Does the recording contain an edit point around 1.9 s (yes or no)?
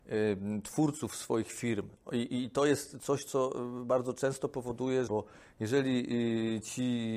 no